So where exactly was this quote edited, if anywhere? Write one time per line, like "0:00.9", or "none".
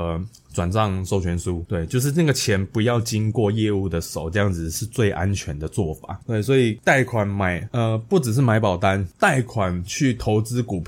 0:06.2